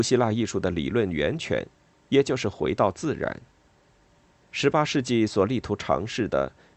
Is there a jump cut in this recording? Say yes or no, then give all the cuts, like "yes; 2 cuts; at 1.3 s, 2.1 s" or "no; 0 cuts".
yes; 2 cuts; at 2.0 s, 4.4 s